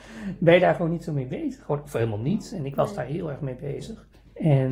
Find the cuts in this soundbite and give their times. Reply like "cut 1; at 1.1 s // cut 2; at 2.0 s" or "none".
none